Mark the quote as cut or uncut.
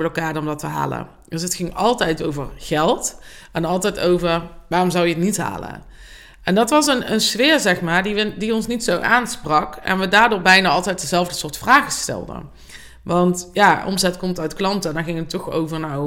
uncut